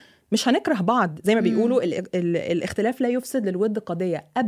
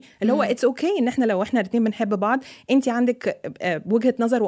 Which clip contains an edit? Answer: first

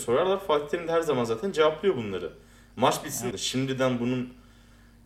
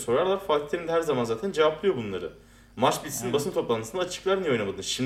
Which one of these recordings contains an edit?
first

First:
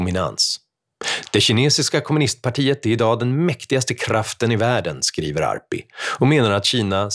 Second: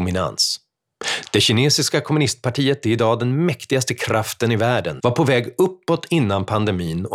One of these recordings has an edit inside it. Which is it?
second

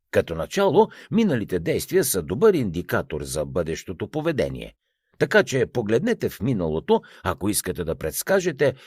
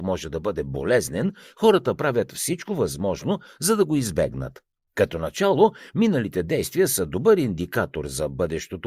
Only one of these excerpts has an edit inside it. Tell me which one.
second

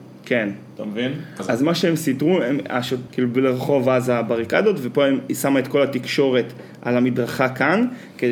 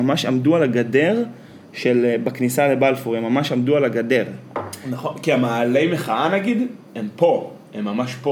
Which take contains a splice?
first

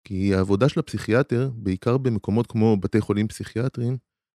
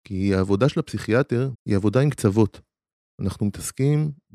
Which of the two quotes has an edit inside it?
second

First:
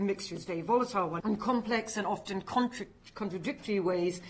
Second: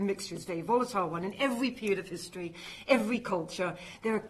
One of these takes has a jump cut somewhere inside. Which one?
first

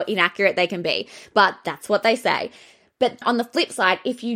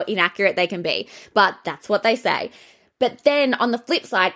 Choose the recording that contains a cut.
first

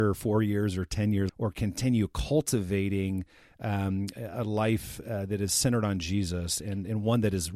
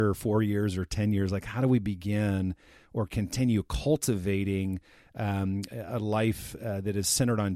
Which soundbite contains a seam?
first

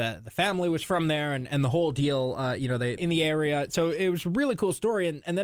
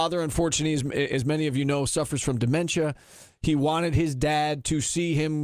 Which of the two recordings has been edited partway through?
first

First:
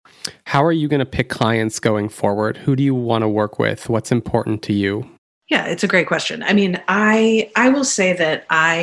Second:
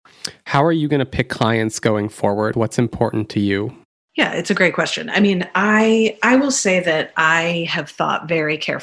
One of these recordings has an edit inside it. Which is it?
second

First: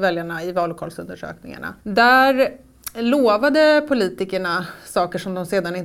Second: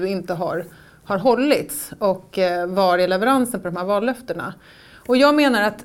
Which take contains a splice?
first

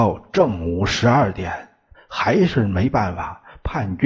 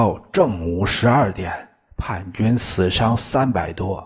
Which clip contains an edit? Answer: first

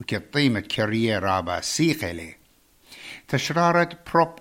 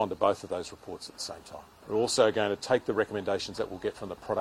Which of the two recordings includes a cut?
second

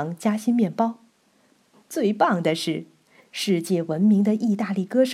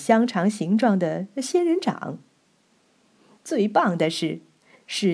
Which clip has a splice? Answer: first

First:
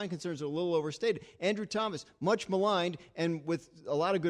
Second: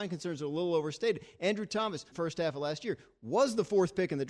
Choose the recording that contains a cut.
second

